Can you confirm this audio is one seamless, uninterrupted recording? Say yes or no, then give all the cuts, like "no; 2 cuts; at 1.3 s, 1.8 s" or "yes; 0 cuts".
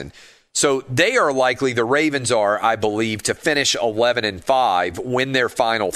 yes; 0 cuts